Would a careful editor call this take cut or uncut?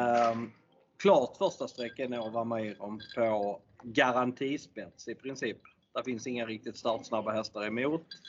uncut